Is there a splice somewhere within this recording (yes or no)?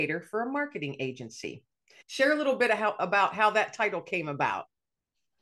yes